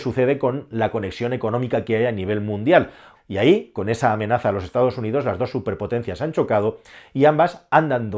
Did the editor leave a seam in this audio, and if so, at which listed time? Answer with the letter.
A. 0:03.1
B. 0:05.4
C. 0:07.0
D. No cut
A